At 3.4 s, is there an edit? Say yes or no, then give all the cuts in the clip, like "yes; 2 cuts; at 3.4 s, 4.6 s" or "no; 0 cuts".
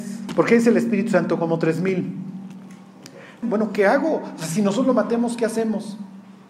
yes; 1 cut; at 3.4 s